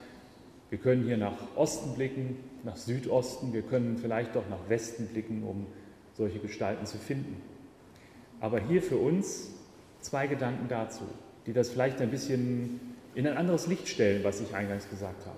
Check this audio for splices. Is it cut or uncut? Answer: uncut